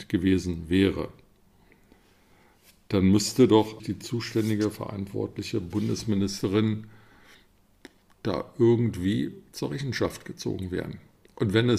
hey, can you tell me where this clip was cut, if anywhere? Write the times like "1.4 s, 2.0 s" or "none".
3.8 s